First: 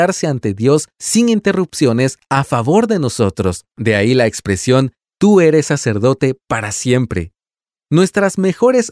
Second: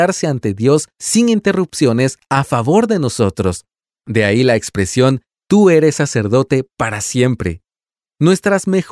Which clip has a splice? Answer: first; 1 cut; at 3.7 s

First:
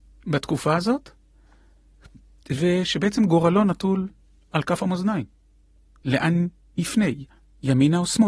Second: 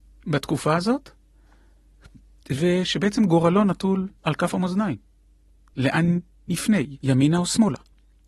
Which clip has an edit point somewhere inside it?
second; 2 cuts; at 4.2 s, 7.0 s

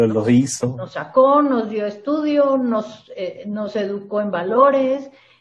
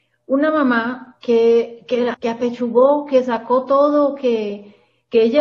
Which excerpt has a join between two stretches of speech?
second; 1 cut; at 2.1 s

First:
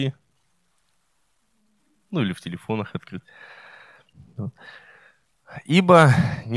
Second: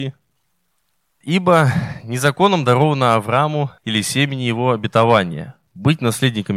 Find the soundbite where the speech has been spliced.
second; 2 cuts; at 1.2 s, 3.8 s

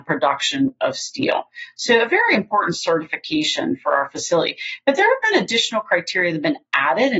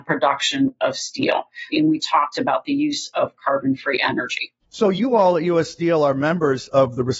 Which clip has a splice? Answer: second; 1 cut; at 1.7 s

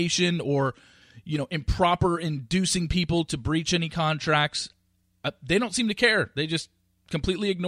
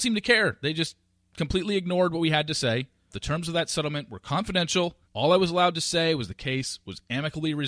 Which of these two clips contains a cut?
second; 2 cuts; at 3.1 s, 5.0 s

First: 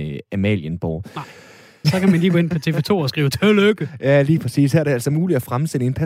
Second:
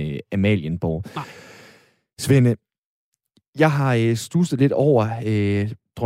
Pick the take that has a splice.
first; 1 cut; at 1.8 s

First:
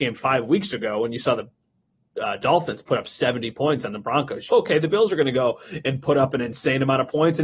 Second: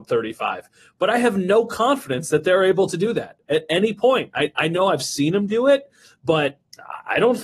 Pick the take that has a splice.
first; 1 cut; at 4.5 s

